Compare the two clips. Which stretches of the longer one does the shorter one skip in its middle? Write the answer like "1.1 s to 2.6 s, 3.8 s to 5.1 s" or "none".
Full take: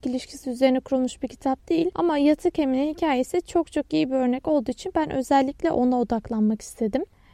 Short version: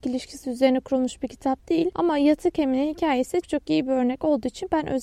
3.4 s to 3.6 s

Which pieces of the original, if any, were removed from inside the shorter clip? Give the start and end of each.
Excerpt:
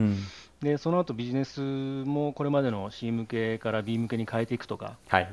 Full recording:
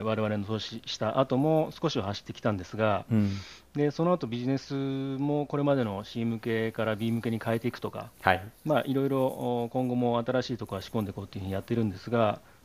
none

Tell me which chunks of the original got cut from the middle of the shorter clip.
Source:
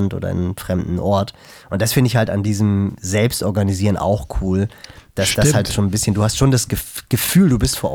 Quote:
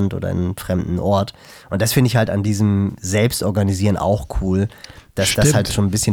none

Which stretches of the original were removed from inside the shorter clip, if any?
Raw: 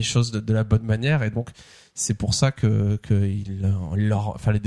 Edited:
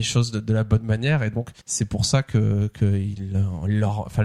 1.6 s to 1.9 s

